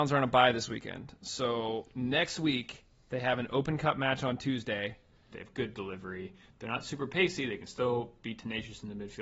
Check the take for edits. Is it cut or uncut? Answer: cut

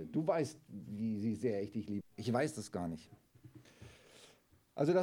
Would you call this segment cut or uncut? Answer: cut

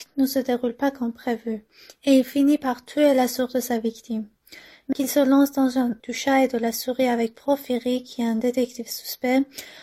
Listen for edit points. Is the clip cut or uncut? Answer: cut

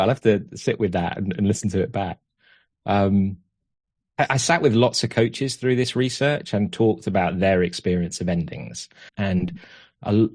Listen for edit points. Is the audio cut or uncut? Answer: cut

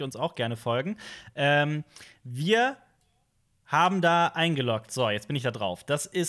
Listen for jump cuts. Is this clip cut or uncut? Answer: uncut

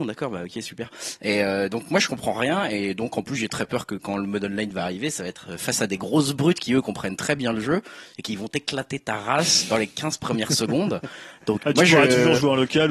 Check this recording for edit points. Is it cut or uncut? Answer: cut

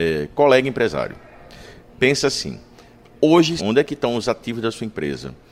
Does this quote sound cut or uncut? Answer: cut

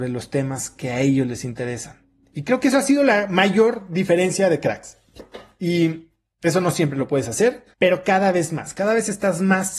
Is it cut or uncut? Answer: cut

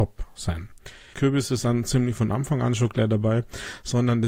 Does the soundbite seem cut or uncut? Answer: cut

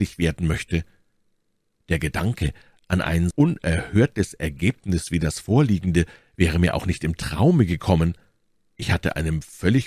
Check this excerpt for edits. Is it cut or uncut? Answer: cut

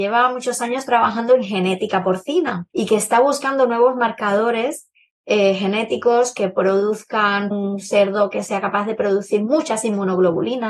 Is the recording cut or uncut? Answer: cut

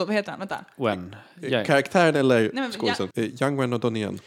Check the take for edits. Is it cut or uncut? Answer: cut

